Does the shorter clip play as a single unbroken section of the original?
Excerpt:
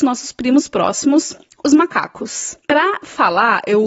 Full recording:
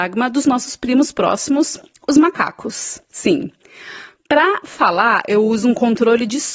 no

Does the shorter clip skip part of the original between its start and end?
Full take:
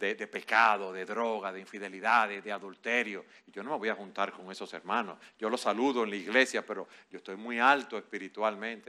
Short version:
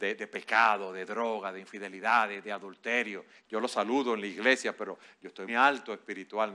yes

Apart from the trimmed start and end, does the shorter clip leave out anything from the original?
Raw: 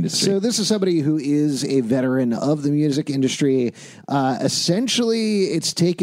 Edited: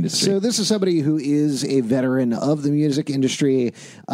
no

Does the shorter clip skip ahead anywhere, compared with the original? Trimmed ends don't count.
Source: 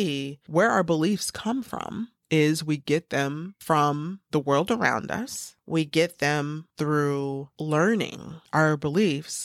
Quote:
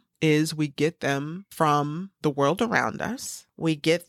no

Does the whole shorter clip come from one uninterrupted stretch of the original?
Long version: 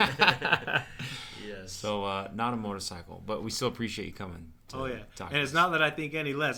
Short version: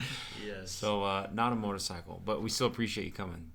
yes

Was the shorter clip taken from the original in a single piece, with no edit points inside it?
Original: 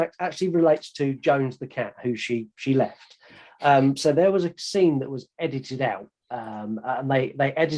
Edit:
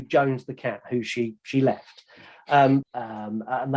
no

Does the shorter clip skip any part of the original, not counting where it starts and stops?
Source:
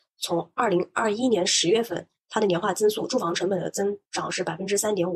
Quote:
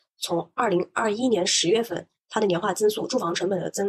no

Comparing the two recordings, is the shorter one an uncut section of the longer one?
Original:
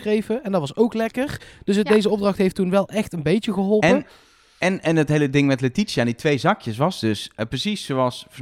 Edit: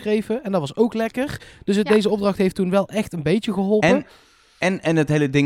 yes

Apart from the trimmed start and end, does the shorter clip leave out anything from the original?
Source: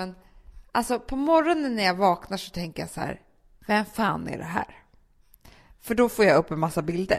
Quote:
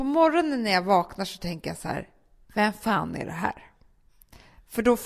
no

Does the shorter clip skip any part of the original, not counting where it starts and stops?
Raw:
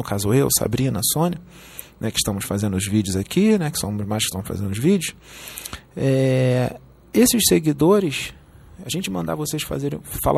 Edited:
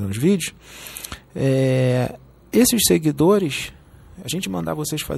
no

